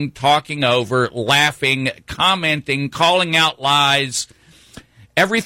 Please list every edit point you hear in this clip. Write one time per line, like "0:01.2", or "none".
none